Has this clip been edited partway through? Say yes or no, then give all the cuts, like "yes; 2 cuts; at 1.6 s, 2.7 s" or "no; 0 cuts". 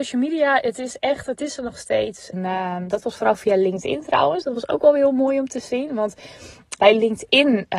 yes; 2 cuts; at 2.3 s, 6.8 s